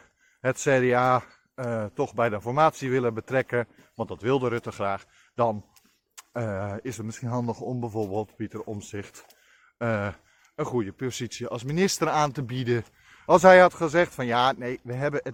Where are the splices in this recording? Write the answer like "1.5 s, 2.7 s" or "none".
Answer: 13.3 s